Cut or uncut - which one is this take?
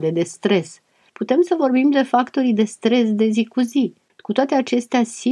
cut